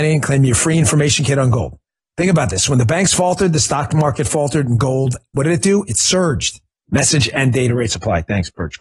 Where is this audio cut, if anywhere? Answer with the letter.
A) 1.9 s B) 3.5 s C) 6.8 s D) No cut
C